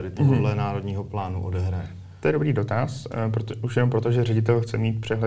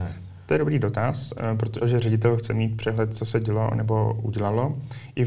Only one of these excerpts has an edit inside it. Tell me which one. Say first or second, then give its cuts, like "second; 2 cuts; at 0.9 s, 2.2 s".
second; 1 cut; at 1.8 s